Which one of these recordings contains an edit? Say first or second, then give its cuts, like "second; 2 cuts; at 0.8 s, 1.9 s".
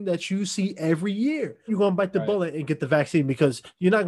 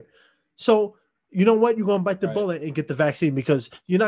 first; 1 cut; at 1.7 s